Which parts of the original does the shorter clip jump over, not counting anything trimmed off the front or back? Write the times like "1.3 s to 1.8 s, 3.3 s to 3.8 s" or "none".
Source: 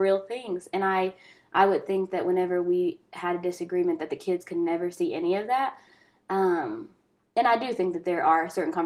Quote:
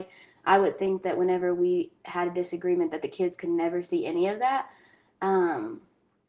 none